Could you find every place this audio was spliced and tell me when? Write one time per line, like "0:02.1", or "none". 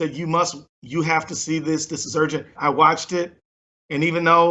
0:02.5